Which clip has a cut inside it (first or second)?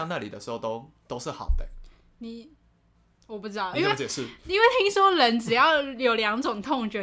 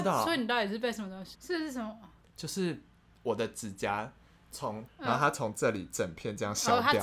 second